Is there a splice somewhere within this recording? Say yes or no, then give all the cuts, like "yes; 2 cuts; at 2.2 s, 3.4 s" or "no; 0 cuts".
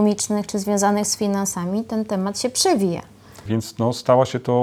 yes; 1 cut; at 3.5 s